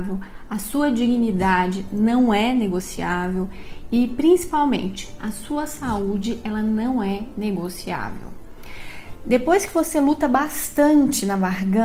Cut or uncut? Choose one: uncut